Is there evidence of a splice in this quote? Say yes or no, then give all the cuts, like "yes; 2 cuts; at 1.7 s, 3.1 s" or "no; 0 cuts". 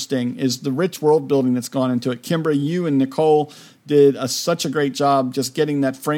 no; 0 cuts